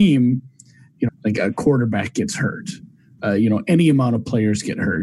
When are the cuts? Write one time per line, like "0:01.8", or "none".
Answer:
0:01.1